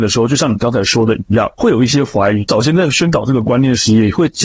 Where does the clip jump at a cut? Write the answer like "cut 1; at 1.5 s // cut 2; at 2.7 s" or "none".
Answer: none

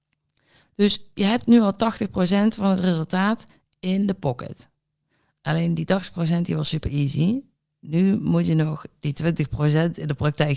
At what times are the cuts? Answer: none

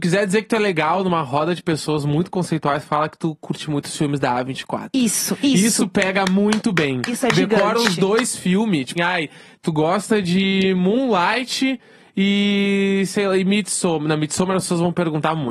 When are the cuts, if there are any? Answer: cut 1; at 9.0 s

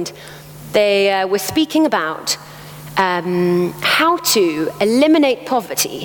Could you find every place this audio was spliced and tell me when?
none

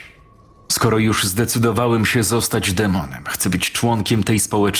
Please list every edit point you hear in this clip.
none

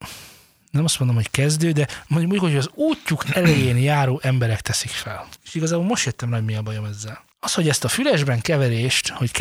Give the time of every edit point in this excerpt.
cut 1; at 5.4 s // cut 2; at 7.3 s

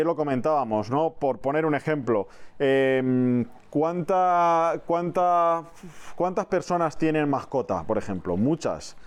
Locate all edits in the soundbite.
none

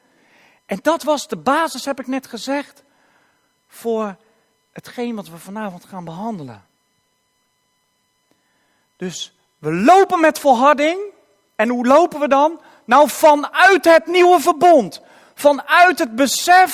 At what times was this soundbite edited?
none

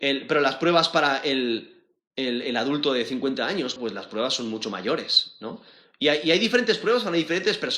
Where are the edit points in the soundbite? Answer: cut 1; at 3.8 s

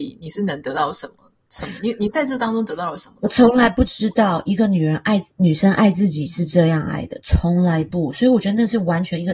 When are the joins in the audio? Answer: none

